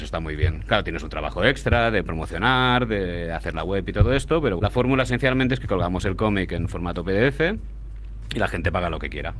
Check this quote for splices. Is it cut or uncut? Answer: cut